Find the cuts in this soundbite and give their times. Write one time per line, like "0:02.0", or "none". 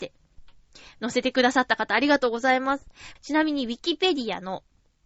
0:03.2